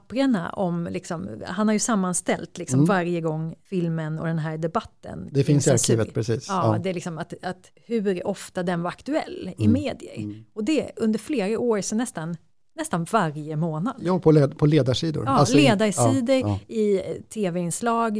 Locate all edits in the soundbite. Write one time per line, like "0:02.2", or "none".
none